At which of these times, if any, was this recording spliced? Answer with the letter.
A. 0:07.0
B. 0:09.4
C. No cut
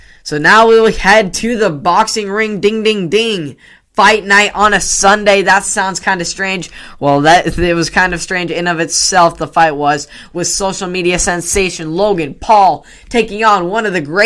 C